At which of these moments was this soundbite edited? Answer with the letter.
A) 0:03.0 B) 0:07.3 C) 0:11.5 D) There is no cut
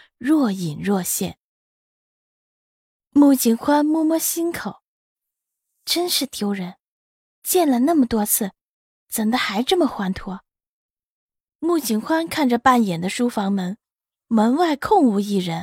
C